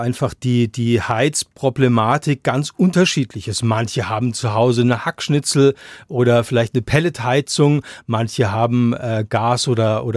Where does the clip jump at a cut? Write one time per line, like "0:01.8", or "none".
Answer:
none